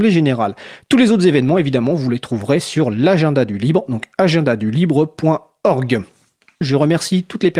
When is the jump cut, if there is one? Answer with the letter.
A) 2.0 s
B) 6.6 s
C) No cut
B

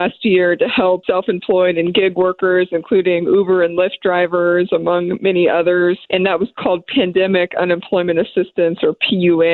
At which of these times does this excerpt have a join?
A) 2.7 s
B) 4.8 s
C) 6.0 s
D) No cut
D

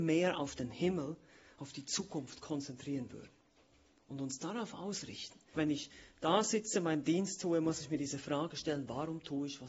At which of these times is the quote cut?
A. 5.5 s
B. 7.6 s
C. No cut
A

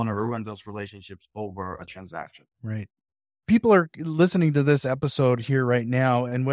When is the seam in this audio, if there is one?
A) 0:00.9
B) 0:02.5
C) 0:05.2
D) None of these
B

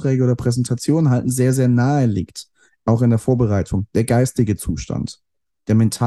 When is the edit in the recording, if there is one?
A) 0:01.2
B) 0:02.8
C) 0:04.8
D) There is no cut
D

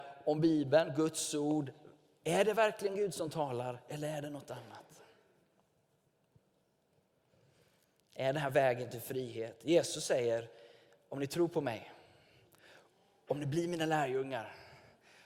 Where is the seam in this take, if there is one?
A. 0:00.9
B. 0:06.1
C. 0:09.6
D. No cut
D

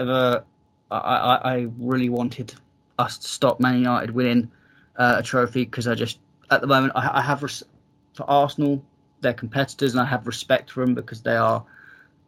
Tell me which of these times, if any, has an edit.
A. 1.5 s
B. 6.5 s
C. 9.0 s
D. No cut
D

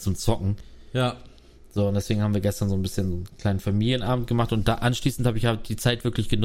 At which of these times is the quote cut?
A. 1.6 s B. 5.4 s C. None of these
C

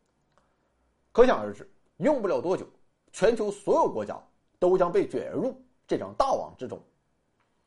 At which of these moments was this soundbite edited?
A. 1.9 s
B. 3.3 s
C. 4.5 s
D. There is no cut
A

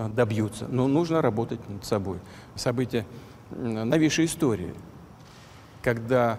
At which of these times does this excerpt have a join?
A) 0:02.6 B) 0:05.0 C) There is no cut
A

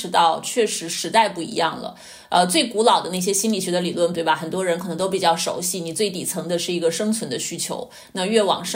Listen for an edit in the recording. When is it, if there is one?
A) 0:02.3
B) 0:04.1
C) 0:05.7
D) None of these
B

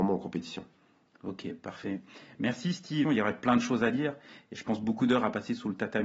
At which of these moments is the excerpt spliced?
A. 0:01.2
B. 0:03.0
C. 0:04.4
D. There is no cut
B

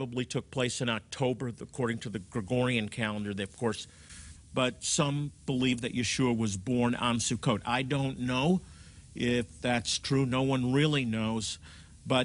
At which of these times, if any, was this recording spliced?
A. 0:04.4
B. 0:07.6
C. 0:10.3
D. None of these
A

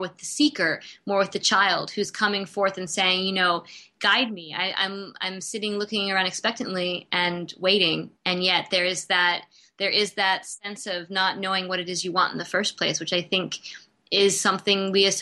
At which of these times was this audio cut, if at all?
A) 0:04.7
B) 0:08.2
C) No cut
B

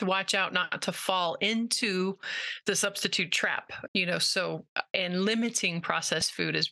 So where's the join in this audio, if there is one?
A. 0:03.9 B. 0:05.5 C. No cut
A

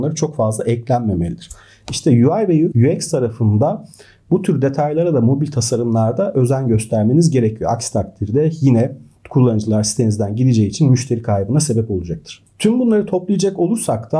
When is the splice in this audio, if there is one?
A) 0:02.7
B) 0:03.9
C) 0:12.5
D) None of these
A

